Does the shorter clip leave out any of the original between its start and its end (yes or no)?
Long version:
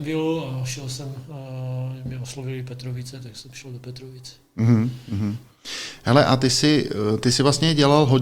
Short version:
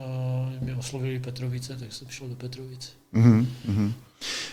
no